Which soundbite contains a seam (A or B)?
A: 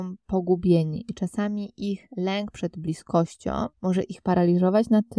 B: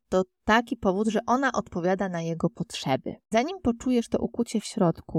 A